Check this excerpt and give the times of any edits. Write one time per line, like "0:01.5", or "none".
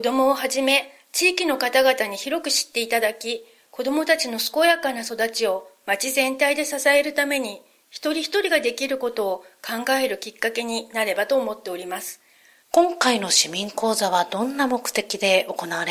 0:12.6